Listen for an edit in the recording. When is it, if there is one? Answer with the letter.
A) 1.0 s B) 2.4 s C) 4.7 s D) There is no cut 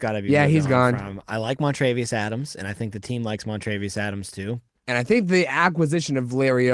C